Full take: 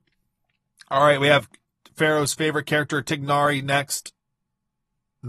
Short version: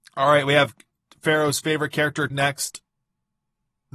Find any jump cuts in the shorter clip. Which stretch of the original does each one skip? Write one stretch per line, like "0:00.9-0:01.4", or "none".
0:03.0-0:03.6